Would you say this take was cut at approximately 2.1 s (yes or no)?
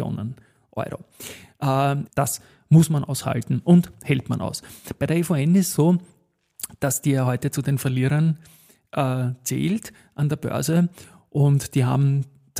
yes